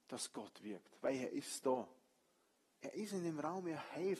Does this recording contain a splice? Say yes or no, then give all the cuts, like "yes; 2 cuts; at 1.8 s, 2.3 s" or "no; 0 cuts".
no; 0 cuts